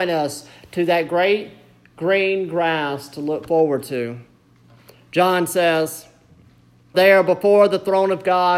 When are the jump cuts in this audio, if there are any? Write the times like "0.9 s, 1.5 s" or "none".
6.9 s